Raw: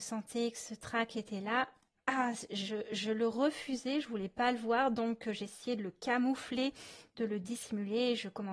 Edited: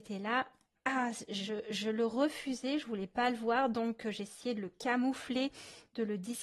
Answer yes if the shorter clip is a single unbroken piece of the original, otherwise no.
yes